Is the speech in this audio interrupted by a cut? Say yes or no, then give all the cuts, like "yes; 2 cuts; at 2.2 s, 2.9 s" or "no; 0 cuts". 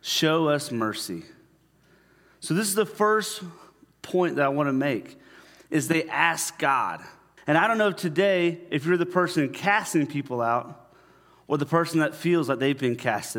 yes; 1 cut; at 7.4 s